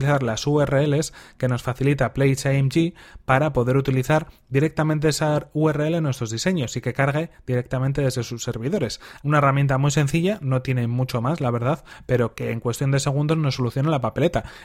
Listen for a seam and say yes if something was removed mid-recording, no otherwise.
yes